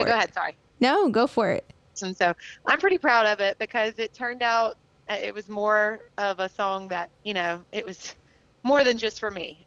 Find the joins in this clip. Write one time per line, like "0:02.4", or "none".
0:02.0
0:06.1
0:07.2